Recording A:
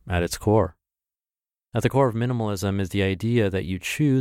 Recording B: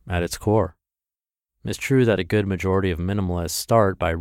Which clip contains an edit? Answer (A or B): B